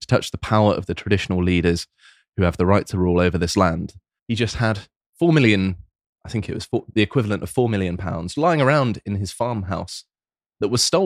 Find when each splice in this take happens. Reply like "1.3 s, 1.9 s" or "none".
4.2 s, 8.3 s